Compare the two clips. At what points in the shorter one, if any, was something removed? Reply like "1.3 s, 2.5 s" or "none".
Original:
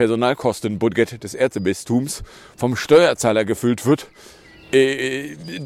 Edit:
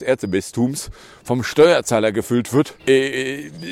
2.8 s